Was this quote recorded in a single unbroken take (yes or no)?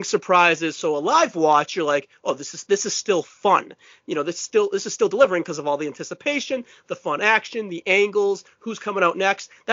yes